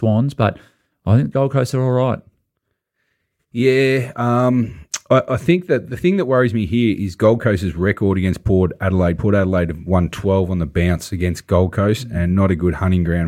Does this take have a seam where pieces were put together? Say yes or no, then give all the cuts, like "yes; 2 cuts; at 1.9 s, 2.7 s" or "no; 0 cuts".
no; 0 cuts